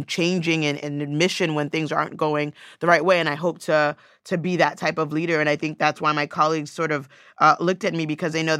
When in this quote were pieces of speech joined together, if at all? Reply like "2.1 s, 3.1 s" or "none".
none

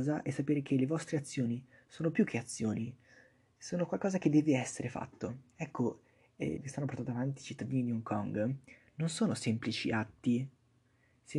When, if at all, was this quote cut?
5.5 s, 6.6 s

